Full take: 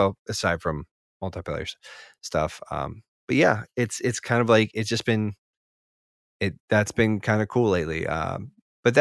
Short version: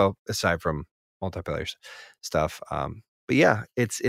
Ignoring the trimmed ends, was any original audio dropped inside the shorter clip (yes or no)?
no